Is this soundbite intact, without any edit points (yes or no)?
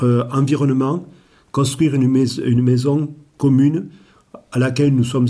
yes